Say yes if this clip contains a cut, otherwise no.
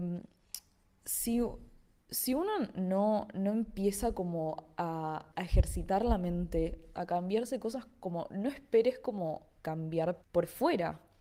yes